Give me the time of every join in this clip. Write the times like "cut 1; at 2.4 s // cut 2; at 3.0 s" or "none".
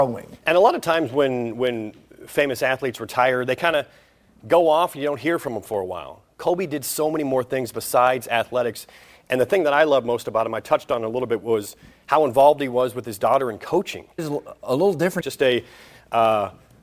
cut 1; at 14.2 s // cut 2; at 15.2 s